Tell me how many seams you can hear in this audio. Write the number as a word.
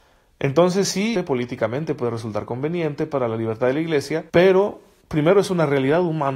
two